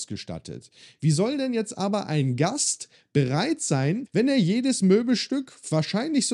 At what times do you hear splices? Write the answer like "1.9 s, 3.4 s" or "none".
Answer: 4.1 s

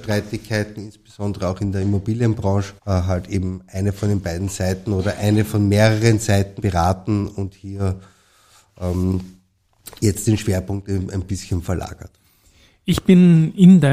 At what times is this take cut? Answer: 2.8 s, 6.6 s

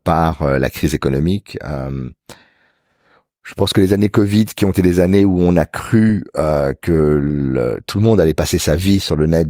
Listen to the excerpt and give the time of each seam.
none

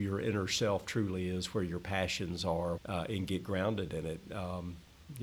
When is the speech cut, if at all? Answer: 2.8 s

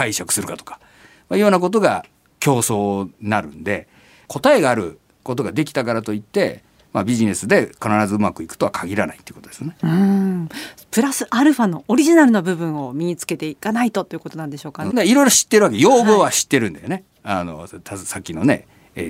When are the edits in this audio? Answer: 14.9 s

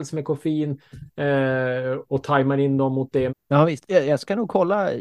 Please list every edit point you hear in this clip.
3.3 s

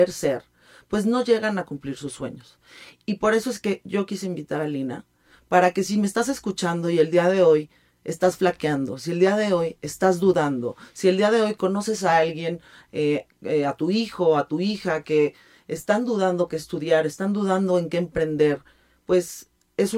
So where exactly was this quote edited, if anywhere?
none

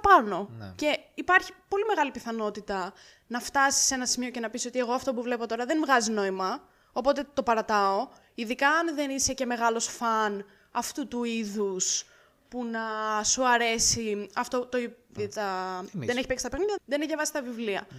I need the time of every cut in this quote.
15.2 s, 16.8 s

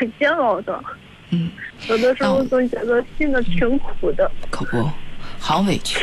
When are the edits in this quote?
none

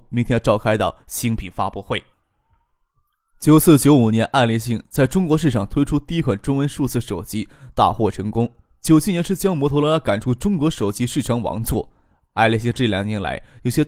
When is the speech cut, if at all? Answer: none

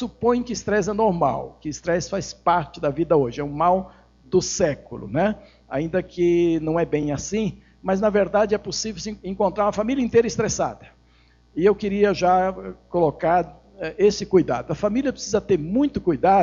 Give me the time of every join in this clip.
none

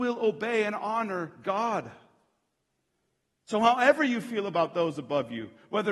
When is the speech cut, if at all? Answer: none

